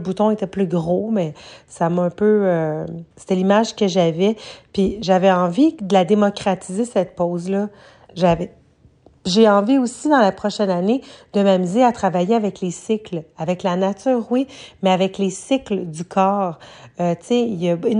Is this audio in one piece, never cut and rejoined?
no; 1 cut; at 3.1 s

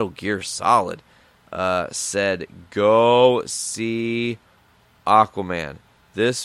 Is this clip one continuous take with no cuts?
yes; 0 cuts

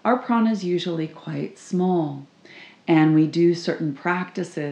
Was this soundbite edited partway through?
no; 0 cuts

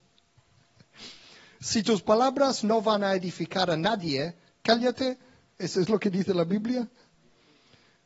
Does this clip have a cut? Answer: no; 0 cuts

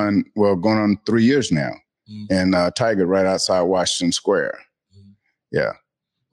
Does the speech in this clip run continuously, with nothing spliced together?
yes; 0 cuts

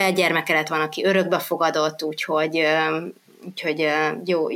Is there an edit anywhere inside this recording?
no; 0 cuts

